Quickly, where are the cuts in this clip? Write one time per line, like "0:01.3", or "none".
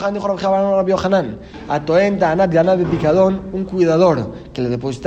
none